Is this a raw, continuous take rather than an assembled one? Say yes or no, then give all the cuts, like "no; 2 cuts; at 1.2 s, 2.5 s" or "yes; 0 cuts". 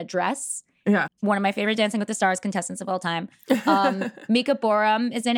no; 1 cut; at 1.1 s